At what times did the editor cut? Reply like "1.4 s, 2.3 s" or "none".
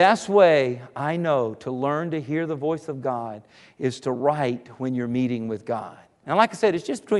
6.2 s